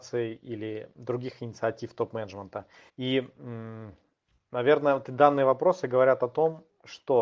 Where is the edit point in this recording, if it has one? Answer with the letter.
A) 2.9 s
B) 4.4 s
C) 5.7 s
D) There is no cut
A